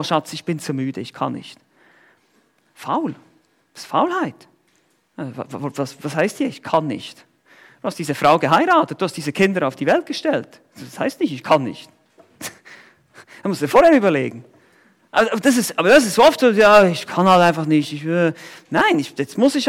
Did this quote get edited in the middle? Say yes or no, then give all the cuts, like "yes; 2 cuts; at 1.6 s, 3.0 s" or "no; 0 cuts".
no; 0 cuts